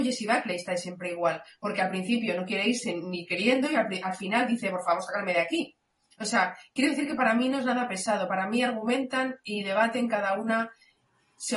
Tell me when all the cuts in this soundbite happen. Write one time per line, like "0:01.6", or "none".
none